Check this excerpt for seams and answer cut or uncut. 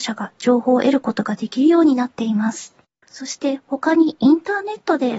cut